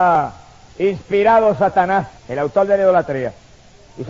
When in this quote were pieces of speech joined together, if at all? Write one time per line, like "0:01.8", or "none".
0:02.2